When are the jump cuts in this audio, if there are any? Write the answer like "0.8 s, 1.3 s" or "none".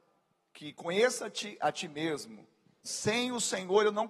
2.8 s